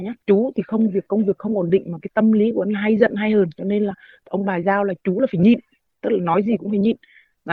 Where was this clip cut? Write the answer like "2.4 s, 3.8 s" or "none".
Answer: none